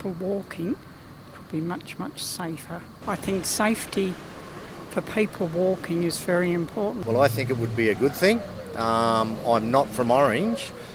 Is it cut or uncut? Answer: uncut